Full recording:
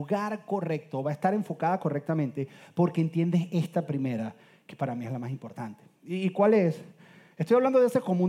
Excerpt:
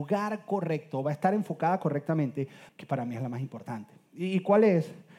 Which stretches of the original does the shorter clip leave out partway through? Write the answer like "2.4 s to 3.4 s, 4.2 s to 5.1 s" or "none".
2.7 s to 4.6 s